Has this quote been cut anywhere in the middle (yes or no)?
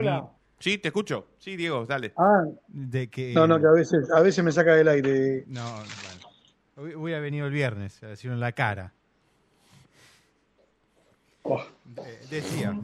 no